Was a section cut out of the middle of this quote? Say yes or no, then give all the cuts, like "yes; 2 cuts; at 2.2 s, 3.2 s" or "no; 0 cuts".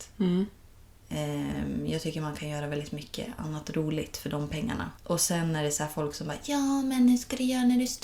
yes; 1 cut; at 5.0 s